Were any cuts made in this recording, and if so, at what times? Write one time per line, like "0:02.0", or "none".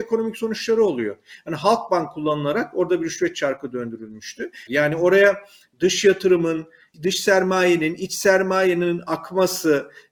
0:04.7